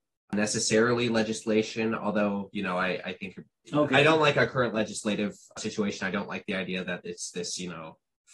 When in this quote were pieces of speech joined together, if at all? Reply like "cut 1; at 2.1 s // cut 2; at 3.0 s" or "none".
cut 1; at 3.9 s